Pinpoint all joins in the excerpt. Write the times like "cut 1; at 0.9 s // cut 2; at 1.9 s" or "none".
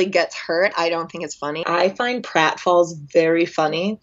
cut 1; at 1.6 s

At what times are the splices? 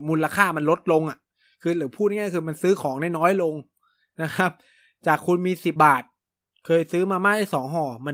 cut 1; at 5.8 s

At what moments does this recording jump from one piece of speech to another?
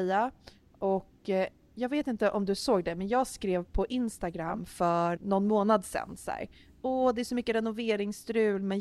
cut 1; at 5.2 s

